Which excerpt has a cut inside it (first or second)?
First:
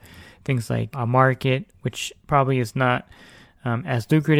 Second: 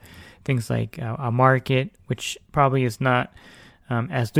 first